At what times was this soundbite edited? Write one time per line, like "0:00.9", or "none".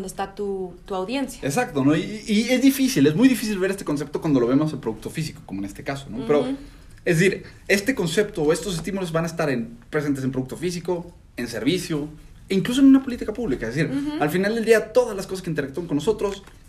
none

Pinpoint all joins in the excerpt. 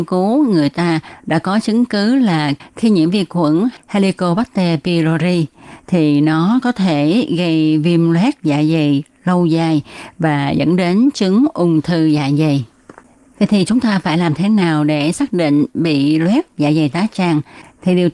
none

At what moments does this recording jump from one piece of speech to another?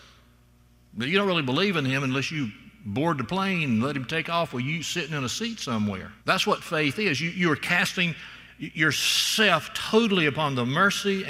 0:06.2

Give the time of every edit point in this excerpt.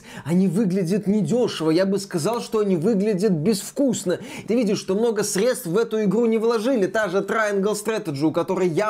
0:04.4

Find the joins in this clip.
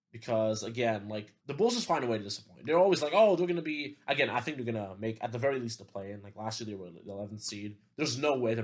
0:01.4

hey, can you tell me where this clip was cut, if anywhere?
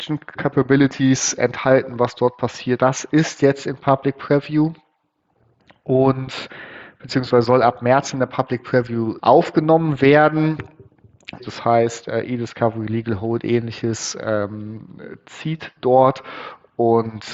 0:02.8
0:09.2
0:11.4

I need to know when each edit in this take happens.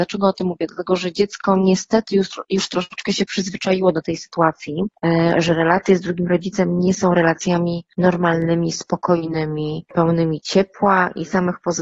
none

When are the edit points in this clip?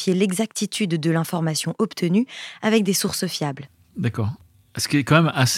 none

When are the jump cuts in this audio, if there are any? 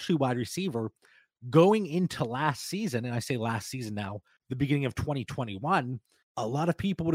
none

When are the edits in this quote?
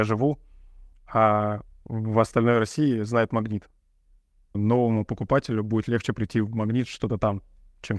0:04.5

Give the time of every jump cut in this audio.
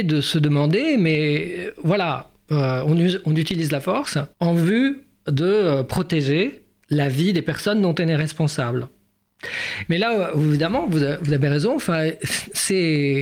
0:04.3
0:09.9

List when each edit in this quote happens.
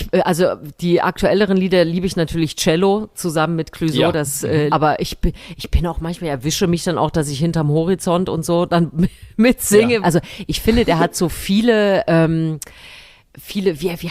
0:04.7
0:10.0

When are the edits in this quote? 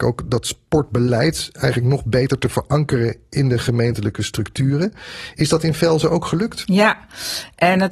none

